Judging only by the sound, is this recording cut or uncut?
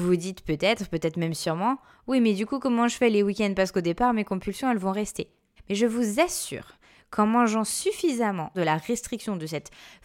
cut